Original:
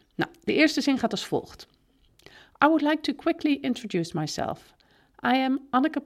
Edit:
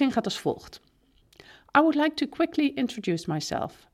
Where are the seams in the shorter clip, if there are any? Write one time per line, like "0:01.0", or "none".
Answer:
none